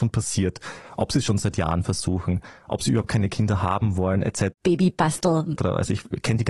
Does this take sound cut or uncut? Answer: cut